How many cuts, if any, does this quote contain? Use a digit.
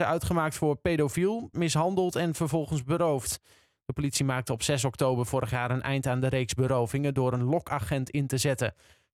1